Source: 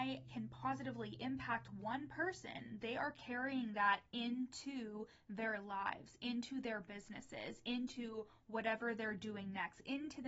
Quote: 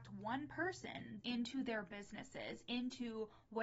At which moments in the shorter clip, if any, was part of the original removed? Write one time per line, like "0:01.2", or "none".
0:01.2